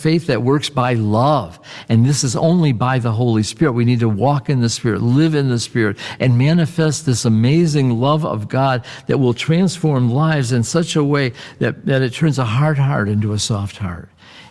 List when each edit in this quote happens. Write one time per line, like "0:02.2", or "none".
none